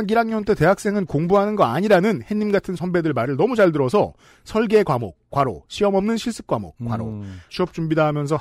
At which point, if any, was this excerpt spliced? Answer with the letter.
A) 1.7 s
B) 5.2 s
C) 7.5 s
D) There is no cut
C